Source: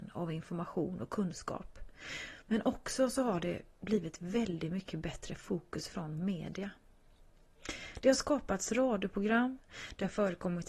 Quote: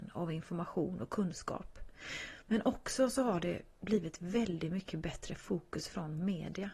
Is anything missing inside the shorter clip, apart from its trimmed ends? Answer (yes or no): no